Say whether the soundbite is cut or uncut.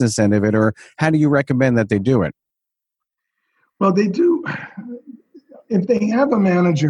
uncut